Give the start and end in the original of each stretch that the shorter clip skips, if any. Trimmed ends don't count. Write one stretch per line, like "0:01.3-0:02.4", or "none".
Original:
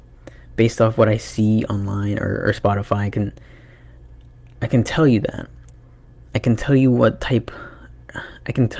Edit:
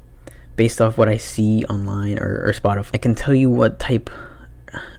0:02.9-0:06.3